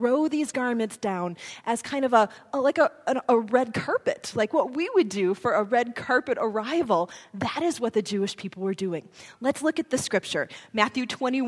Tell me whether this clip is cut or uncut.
uncut